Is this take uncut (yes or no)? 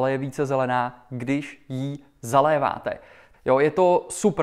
no